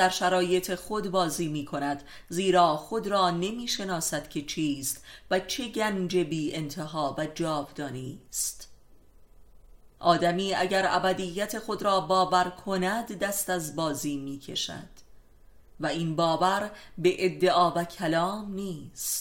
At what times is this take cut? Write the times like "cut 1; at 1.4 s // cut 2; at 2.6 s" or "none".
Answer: none